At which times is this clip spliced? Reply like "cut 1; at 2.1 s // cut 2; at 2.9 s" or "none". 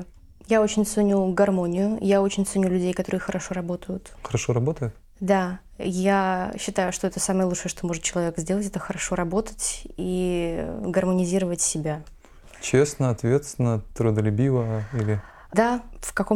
none